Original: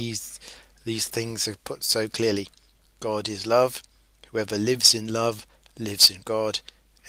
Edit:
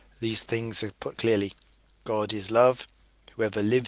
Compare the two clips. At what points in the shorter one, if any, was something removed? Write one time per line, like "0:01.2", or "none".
0:01.1